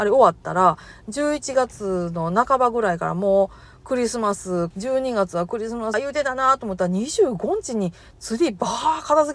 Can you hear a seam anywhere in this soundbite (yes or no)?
yes